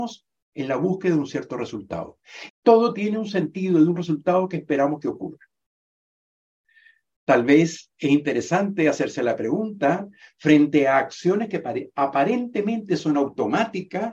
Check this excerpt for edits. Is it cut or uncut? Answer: cut